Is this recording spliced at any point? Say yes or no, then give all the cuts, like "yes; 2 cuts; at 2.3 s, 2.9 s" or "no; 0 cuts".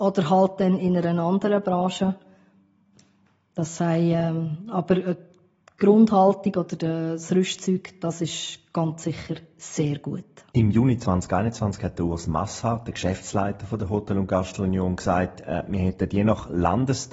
no; 0 cuts